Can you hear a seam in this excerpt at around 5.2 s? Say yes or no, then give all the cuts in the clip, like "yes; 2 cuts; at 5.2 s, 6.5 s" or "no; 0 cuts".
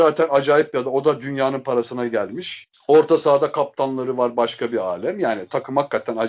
no; 0 cuts